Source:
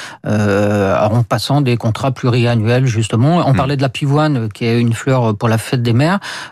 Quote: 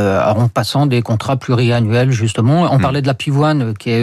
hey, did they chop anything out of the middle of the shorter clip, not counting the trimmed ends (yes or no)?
no